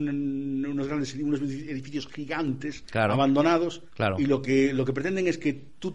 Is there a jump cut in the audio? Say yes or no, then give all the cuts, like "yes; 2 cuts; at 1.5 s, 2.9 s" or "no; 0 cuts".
no; 0 cuts